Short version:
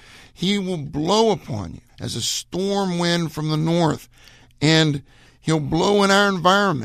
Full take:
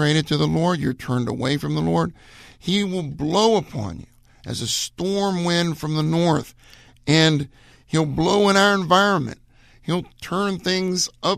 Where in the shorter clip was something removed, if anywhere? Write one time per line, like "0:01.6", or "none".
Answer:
0:01.9